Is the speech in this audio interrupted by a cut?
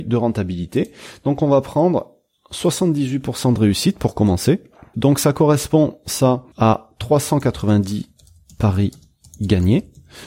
yes; 2 cuts; at 4.9 s, 6.5 s

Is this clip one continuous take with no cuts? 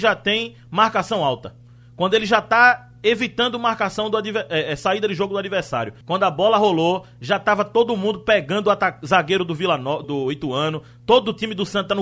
no; 2 cuts; at 6.0 s, 10.0 s

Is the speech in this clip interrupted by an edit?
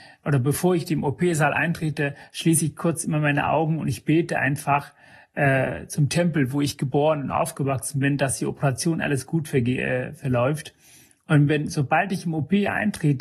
no; 0 cuts

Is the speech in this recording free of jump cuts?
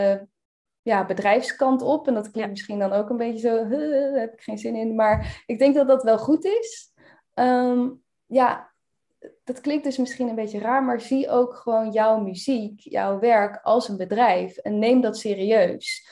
yes; 0 cuts

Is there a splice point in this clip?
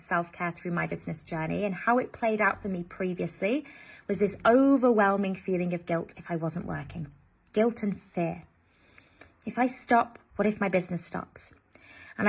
yes; 1 cut; at 9.3 s

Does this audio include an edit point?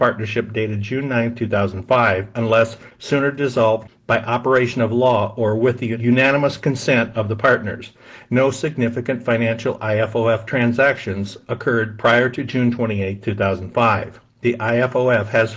no; 0 cuts

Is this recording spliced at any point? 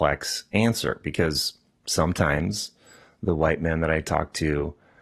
no; 0 cuts

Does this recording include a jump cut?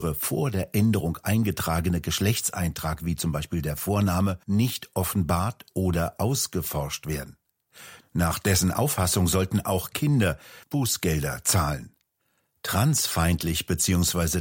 yes; 3 cuts; at 4.4 s, 8.0 s, 10.6 s

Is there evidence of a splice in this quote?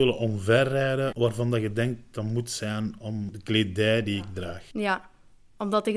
no; 0 cuts

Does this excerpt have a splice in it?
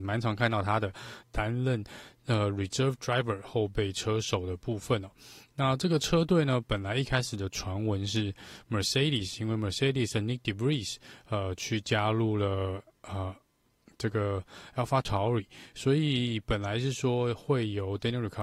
yes; 1 cut; at 1.2 s

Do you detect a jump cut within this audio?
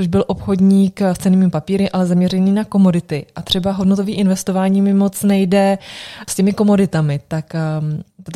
no; 0 cuts

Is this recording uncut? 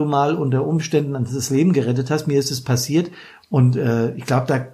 no; 1 cut; at 3.4 s

